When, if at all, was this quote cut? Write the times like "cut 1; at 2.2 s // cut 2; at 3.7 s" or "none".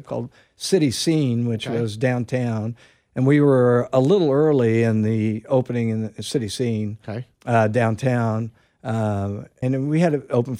cut 1; at 9.6 s